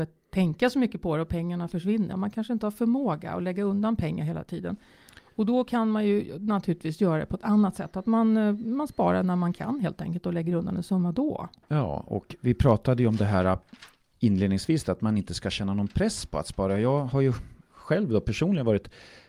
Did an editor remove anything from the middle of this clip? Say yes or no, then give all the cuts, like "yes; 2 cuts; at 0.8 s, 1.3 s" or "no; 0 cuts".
yes; 1 cut; at 2.1 s